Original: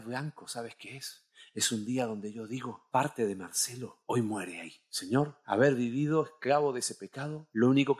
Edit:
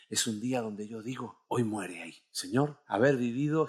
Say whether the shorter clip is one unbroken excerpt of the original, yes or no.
no